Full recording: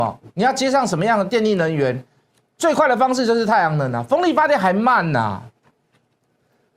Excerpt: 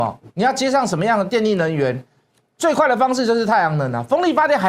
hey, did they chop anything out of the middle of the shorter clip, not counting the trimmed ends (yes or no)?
no